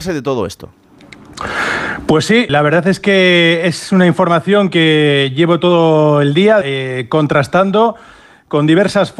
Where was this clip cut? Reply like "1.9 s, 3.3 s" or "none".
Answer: 2.5 s, 6.6 s